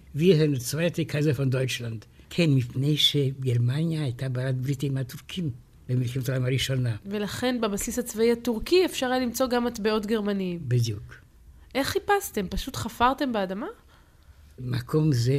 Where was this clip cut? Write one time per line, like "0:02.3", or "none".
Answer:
0:02.2